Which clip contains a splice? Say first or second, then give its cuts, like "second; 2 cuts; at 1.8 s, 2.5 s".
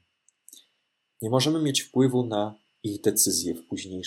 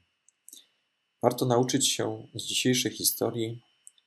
first; 1 cut; at 1.1 s